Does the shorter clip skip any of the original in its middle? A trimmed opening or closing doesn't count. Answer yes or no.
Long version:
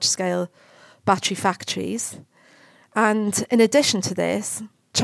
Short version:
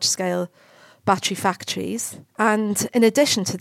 yes